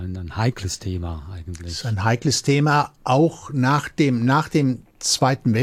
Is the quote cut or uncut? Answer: uncut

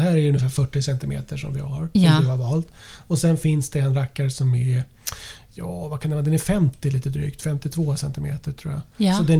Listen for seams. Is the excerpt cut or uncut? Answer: uncut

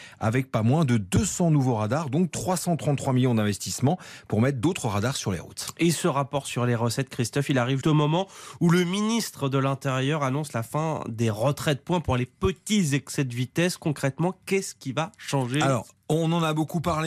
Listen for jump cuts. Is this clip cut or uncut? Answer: cut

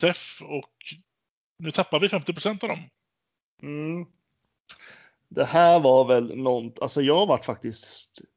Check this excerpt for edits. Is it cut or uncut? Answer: uncut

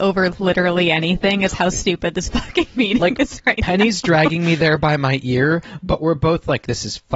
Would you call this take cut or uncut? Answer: uncut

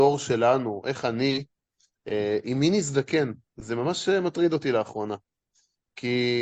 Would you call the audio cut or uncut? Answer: uncut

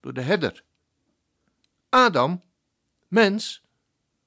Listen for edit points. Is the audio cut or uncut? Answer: uncut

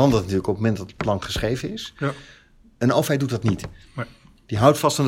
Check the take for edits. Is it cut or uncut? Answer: uncut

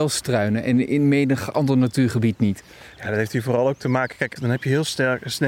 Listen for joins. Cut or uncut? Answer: cut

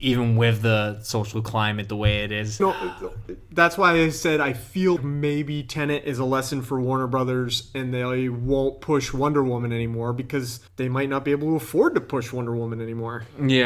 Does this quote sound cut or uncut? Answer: cut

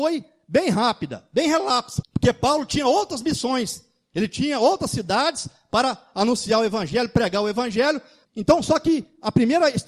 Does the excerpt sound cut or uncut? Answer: cut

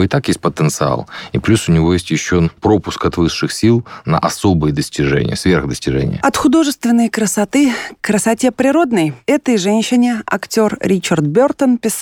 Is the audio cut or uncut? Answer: uncut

